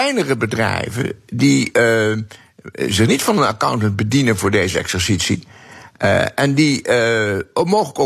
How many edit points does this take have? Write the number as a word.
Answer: zero